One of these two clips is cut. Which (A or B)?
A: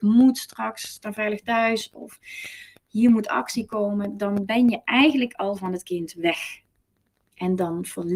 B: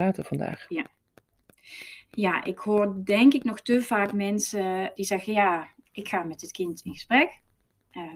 B